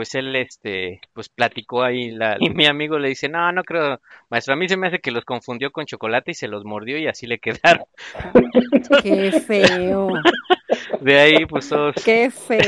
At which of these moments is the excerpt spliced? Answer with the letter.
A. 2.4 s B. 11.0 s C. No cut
A